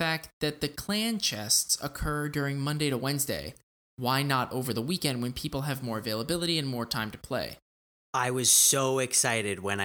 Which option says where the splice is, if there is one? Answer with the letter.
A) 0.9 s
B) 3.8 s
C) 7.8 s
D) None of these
D